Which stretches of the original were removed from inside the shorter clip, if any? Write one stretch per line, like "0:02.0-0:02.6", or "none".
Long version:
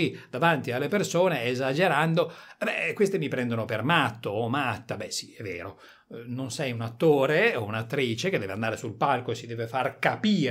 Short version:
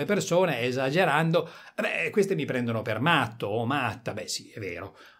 none